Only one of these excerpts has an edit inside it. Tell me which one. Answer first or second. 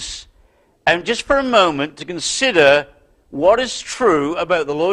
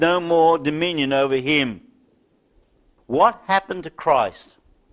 second